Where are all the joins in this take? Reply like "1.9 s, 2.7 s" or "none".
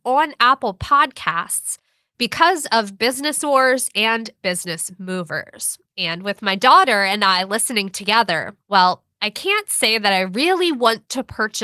5.9 s

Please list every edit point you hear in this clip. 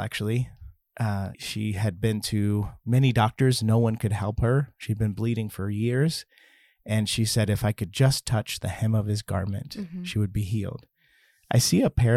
1.3 s

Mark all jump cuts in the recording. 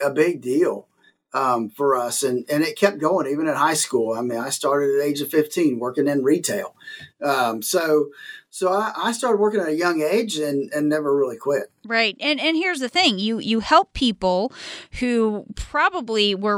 none

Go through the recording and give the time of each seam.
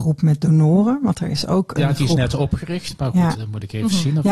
3.3 s

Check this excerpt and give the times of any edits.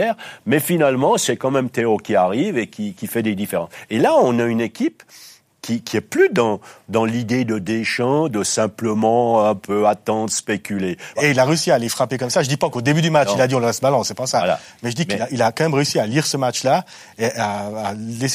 11.2 s

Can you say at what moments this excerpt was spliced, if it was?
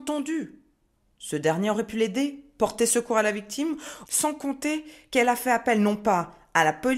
4.0 s

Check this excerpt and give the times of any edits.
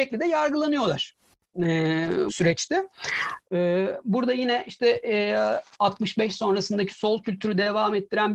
2.3 s, 3.4 s

